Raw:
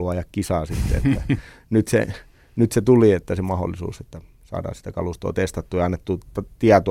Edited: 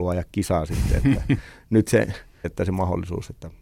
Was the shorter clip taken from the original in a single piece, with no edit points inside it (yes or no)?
no